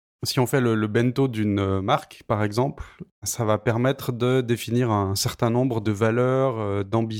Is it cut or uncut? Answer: uncut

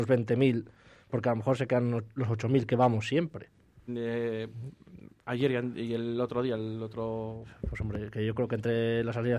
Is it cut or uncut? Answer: cut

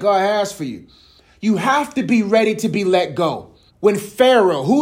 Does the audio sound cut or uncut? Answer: cut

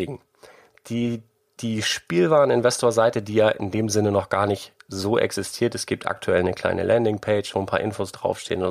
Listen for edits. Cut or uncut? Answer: uncut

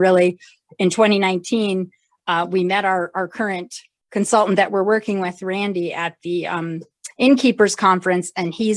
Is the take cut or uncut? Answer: uncut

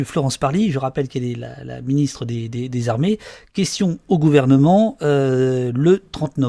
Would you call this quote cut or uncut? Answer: uncut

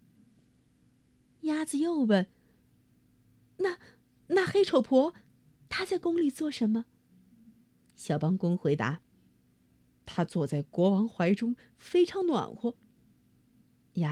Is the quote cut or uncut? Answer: uncut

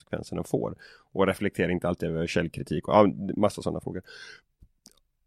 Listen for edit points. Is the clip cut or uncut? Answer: uncut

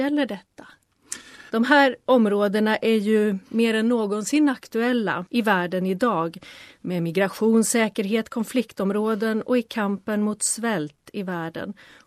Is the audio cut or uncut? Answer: cut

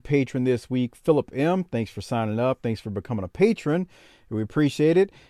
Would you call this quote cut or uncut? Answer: uncut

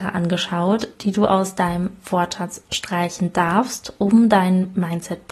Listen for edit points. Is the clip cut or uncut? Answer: uncut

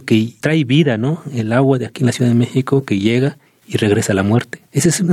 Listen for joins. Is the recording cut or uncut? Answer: uncut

